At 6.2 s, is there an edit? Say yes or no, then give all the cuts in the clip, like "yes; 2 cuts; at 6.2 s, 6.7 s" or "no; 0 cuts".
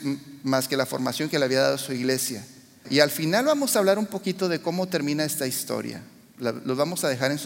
no; 1 cut; at 2.8 s